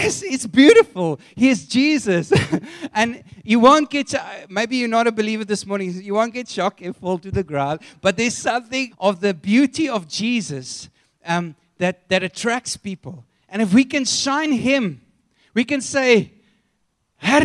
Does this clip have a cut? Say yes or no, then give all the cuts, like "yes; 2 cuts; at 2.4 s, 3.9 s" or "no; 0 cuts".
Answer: yes; 1 cut; at 8.9 s